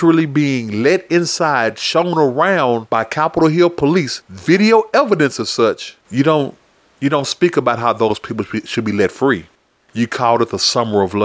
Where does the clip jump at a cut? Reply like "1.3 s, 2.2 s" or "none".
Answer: 6.0 s, 9.7 s